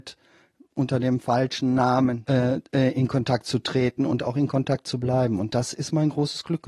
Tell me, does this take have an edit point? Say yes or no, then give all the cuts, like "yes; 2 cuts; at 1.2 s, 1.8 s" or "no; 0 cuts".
yes; 1 cut; at 2.3 s